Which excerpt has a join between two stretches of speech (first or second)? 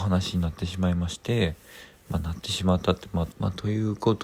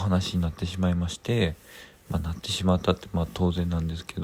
first